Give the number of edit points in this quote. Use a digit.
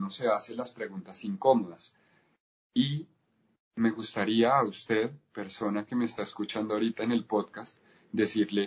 0